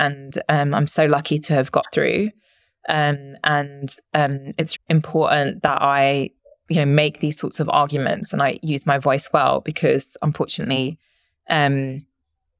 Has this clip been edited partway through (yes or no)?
yes